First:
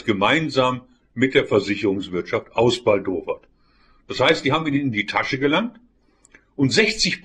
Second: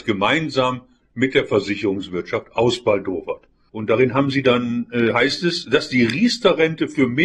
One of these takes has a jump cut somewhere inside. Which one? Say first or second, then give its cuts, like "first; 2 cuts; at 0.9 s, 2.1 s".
second; 1 cut; at 3.7 s